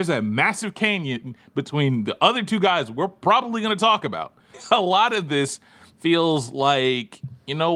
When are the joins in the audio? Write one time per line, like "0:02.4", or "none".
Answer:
0:04.5

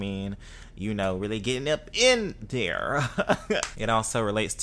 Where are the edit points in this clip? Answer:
0:03.7

